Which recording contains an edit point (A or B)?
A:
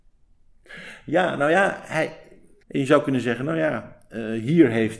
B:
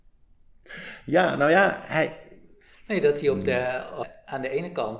A